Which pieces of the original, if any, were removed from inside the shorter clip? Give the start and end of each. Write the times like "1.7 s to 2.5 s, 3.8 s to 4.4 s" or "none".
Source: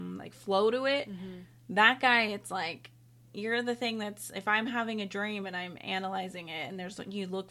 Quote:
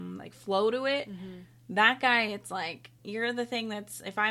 3.0 s to 3.3 s